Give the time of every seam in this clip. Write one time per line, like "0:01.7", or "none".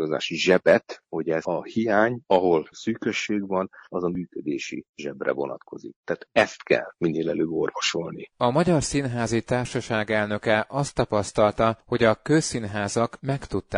none

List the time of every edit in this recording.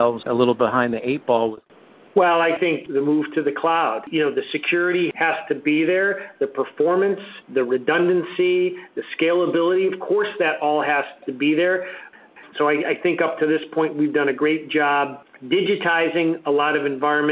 0:12.5

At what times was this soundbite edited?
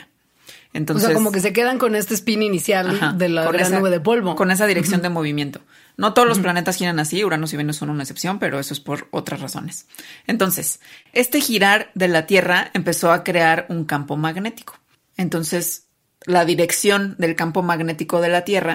none

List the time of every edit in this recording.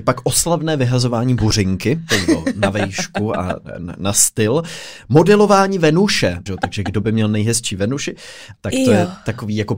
0:06.5
0:08.6

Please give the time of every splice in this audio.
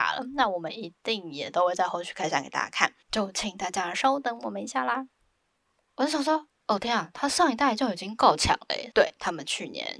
0:03.0
0:05.9
0:08.9

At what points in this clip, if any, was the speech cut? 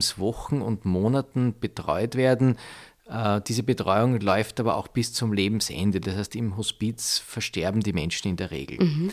none

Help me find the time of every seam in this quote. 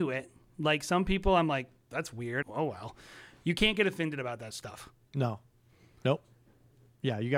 0:02.4

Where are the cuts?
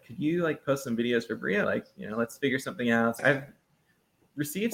0:01.6
0:03.2

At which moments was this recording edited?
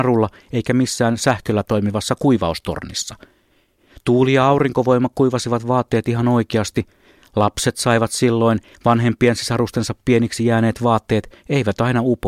none

